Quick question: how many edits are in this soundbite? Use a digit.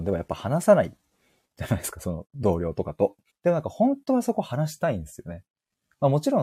1